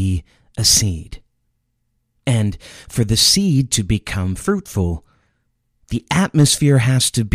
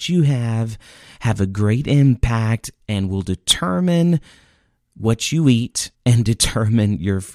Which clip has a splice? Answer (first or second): second